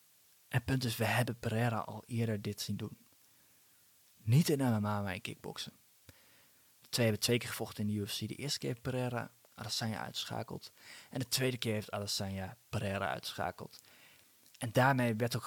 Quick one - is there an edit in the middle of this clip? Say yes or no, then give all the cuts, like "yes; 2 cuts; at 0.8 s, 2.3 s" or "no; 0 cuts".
yes; 1 cut; at 6.6 s